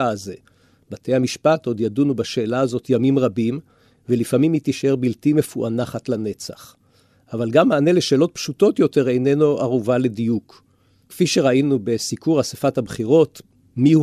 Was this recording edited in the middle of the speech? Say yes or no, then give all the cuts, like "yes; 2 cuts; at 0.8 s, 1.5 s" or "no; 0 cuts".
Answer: no; 0 cuts